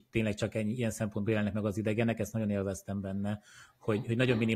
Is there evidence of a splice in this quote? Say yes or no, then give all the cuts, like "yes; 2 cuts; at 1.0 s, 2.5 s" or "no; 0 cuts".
no; 0 cuts